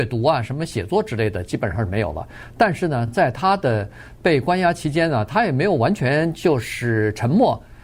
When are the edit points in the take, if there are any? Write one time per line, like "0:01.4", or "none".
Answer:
none